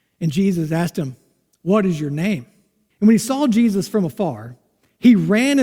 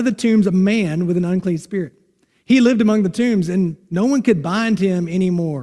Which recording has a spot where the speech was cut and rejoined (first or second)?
first